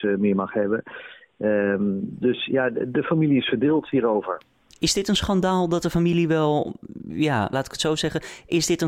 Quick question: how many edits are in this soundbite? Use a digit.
1